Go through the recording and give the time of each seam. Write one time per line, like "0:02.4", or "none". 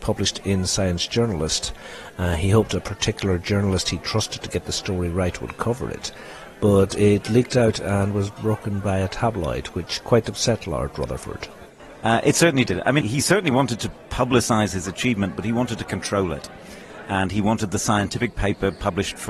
0:13.0